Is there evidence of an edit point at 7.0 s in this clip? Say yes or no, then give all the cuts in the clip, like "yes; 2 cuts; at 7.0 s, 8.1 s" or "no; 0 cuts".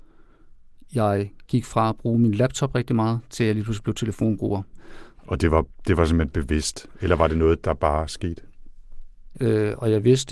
no; 2 cuts; at 5.2 s, 9.3 s